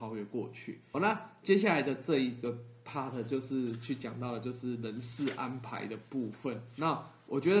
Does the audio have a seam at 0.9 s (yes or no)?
yes